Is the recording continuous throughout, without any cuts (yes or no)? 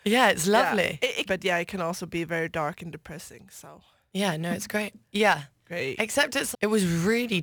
no